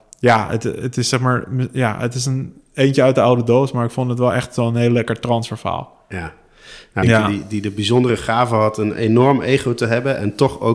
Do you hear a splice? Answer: yes; 1 cut; at 7.0 s

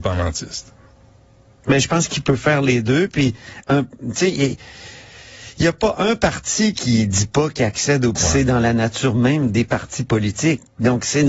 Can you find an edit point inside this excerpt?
yes; 2 cuts; at 6.7 s, 8.1 s

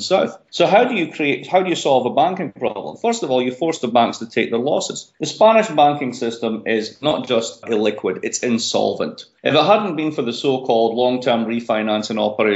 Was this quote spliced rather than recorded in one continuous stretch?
yes; 1 cut; at 5.2 s

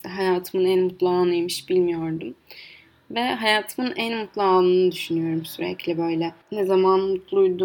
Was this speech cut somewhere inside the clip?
yes; 1 cut; at 6.4 s

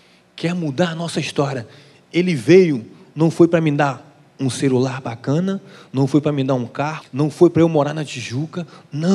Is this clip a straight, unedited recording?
no; 1 cut; at 7.0 s

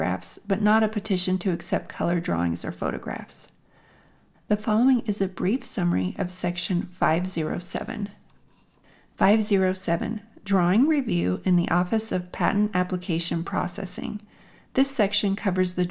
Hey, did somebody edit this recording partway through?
yes; 1 cut; at 4.3 s

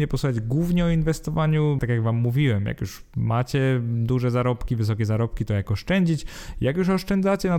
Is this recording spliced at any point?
yes; 1 cut; at 1.8 s

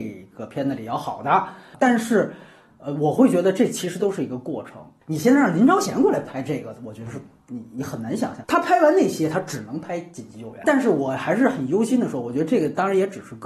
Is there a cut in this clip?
no; 0 cuts

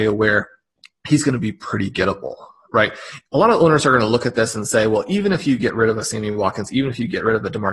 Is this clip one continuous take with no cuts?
no; 1 cut; at 3.3 s

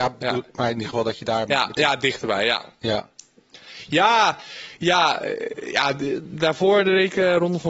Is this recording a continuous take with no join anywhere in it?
yes; 0 cuts

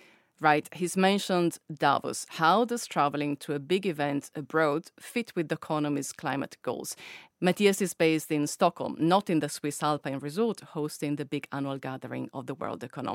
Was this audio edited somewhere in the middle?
no; 0 cuts

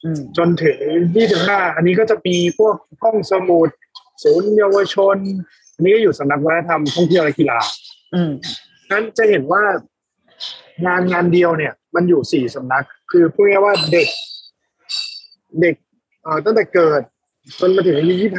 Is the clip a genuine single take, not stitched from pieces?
no; 1 cut; at 11.8 s

